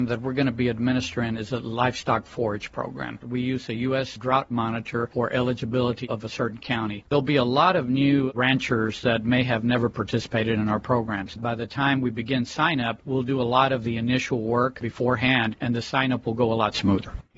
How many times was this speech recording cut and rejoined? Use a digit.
3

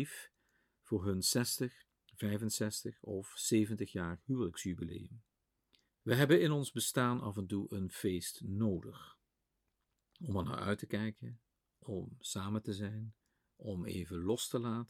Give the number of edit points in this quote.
1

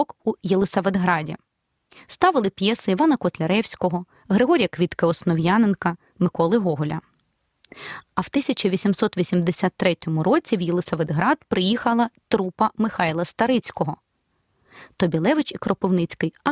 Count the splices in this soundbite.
0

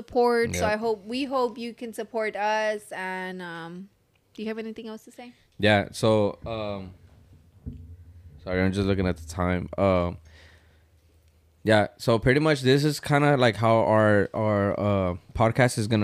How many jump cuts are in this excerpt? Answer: 0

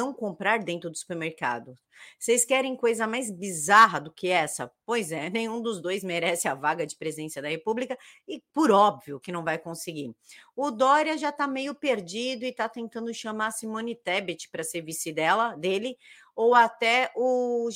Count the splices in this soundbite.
0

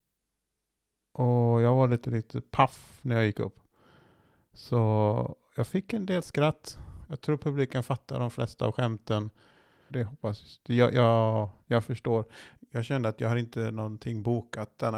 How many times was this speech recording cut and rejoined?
2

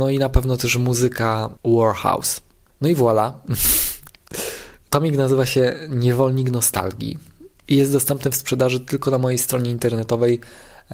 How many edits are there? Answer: 1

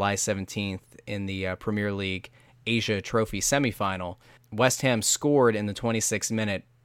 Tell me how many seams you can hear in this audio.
1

